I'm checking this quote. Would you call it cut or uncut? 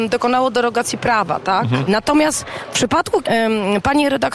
cut